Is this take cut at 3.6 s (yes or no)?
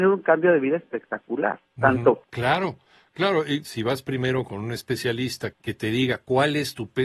yes